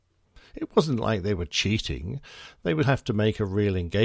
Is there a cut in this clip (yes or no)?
yes